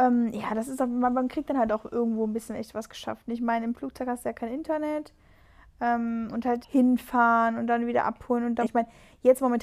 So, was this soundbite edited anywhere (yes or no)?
yes